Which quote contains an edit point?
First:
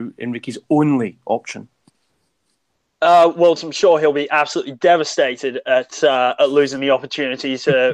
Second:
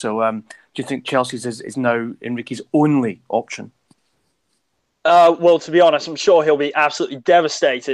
first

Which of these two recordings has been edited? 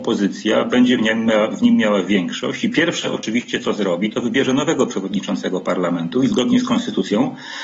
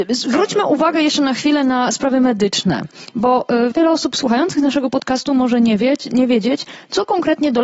second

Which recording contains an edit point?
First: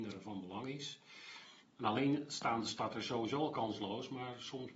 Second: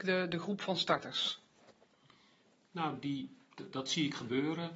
first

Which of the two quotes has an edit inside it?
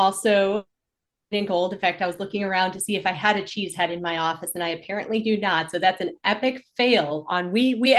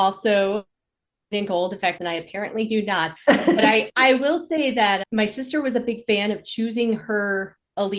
second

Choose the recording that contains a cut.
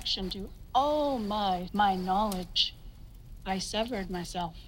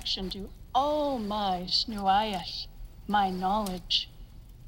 first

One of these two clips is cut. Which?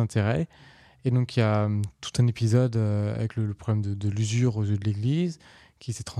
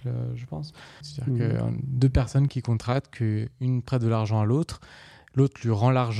second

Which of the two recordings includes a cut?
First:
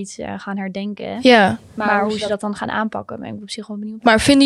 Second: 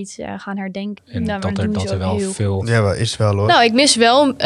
second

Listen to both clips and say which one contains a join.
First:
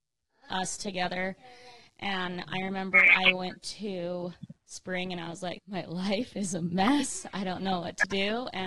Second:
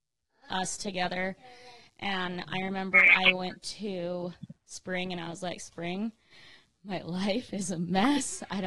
first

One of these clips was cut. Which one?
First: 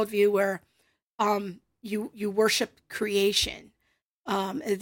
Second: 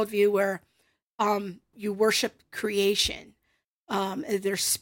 second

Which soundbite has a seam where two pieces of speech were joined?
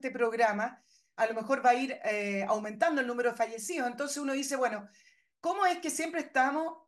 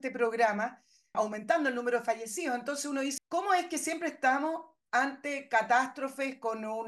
second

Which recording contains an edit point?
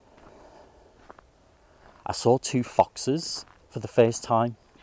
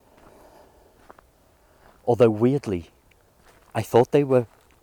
second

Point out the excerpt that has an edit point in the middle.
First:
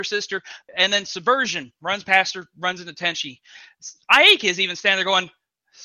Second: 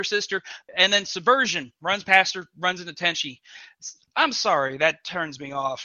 second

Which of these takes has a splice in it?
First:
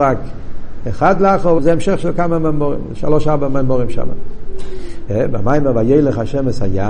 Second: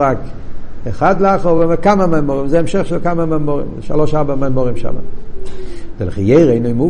first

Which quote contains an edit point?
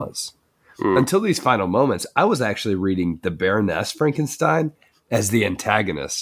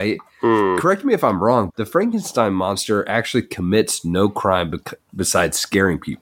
second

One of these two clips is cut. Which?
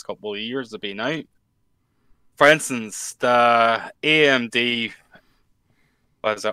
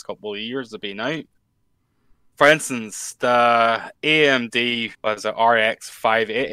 second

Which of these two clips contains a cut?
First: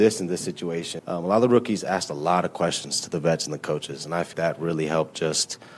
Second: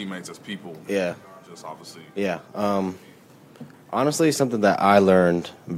first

